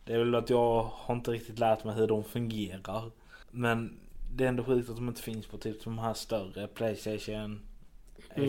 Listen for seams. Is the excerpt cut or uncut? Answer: cut